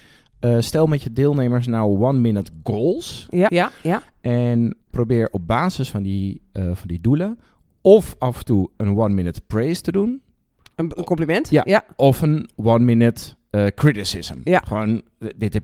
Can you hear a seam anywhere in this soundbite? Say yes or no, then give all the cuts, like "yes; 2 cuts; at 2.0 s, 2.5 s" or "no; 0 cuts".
yes; 1 cut; at 3.5 s